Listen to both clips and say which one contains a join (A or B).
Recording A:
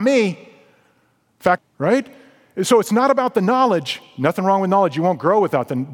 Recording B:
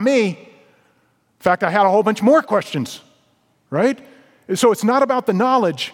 A